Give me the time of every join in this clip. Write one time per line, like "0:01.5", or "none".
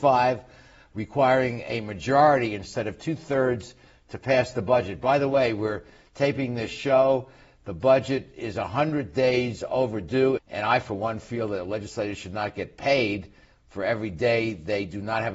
0:10.4